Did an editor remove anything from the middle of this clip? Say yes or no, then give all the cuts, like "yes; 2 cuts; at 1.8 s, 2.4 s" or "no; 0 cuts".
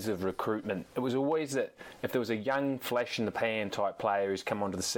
no; 0 cuts